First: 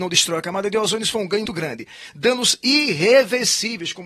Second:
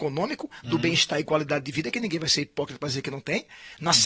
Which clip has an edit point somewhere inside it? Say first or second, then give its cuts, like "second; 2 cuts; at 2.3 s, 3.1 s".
first; 1 cut; at 1.5 s